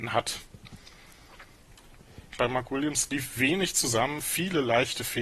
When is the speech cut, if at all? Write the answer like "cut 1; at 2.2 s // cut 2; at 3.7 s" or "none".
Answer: cut 1; at 2.4 s